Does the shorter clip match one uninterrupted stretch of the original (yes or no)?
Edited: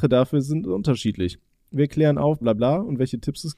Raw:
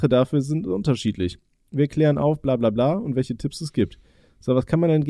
no